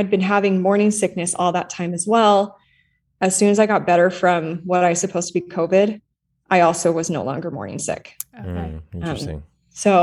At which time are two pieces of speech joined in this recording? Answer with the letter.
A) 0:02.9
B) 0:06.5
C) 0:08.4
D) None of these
D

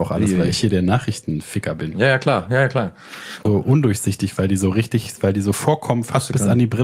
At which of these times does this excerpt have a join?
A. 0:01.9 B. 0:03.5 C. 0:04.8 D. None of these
B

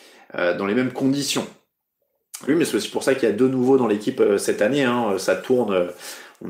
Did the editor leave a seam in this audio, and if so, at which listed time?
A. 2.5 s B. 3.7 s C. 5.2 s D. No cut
A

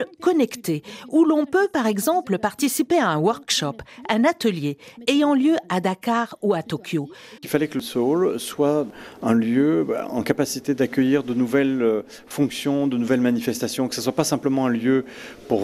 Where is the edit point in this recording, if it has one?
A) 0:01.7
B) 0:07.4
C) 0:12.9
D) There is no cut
B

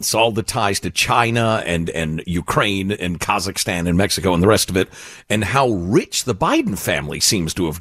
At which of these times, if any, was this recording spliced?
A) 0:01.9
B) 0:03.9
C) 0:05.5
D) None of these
D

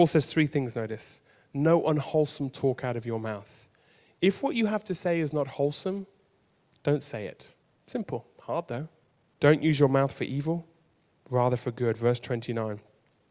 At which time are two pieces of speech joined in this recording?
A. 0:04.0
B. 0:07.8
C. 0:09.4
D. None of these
C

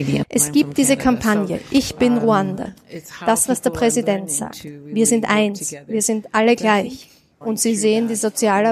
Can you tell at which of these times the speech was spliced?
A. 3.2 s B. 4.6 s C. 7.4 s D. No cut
C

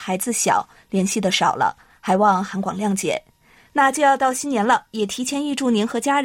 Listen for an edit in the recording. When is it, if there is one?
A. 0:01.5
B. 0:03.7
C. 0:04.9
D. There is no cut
B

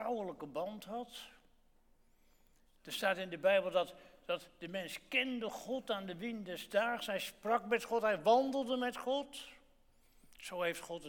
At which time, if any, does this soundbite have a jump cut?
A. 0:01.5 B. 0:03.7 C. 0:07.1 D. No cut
D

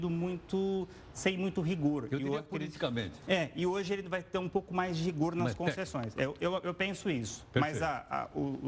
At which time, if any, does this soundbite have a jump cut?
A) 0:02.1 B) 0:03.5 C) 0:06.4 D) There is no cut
D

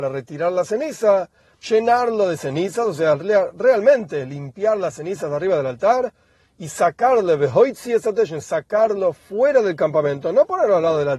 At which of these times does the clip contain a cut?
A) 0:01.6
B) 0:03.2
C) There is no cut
A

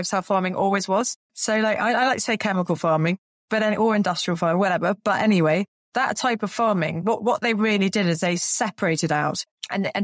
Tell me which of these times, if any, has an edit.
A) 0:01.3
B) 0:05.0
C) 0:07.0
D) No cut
A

